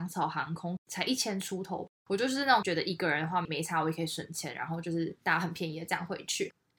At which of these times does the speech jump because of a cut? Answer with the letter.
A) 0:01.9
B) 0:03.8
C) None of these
C